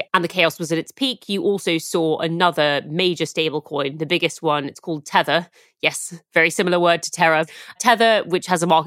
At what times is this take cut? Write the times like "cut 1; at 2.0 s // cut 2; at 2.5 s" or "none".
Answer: none